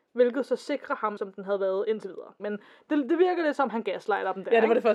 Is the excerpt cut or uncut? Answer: cut